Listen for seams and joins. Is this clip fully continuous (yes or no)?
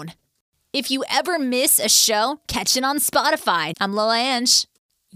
no